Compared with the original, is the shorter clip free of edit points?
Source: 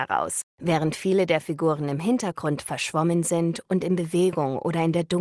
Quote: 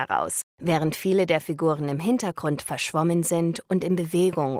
yes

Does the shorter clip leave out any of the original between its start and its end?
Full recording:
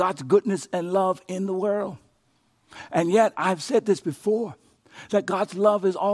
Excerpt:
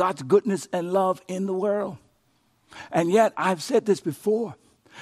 no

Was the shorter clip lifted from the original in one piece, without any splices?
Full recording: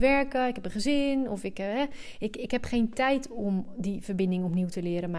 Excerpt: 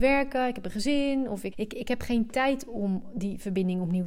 no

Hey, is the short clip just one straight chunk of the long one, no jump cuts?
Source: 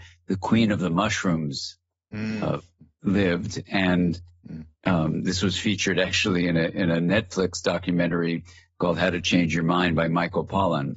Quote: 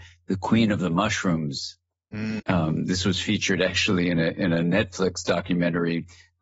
no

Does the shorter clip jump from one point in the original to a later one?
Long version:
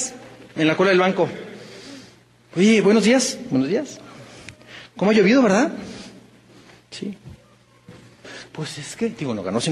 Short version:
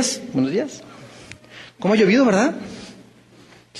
no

